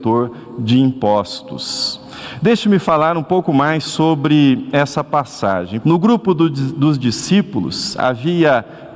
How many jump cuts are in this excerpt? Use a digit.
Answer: 1